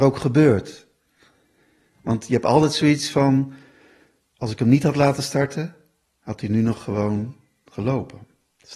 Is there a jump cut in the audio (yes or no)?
no